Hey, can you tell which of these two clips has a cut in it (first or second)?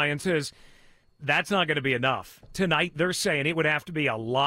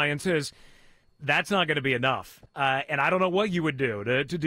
second